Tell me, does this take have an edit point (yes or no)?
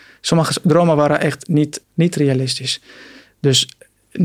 yes